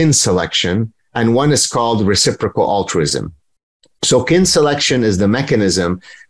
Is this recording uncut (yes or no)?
yes